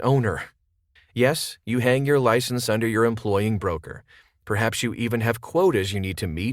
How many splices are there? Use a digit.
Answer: 1